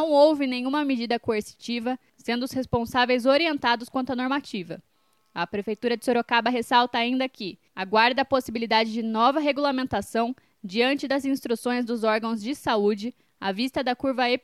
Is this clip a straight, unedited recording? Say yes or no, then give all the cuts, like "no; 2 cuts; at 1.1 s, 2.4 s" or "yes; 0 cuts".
yes; 0 cuts